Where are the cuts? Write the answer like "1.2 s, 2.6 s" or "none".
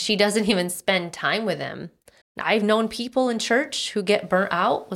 2.2 s